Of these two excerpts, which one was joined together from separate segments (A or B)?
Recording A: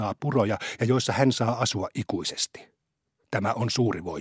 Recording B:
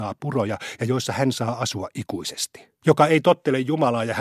B